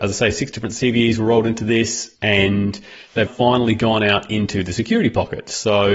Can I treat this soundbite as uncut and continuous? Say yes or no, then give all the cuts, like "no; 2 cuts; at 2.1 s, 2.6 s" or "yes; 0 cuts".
no; 2 cuts; at 2.1 s, 3.3 s